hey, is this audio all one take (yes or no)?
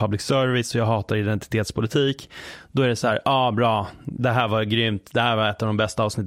yes